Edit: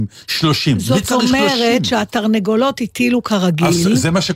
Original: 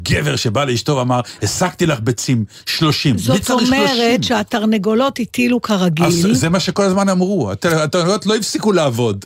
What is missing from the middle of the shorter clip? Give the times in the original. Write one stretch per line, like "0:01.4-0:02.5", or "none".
none